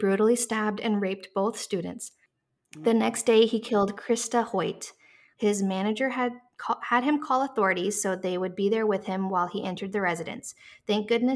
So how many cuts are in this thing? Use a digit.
1